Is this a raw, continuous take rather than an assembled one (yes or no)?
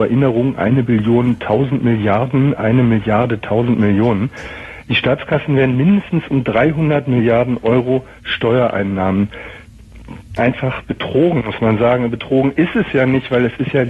yes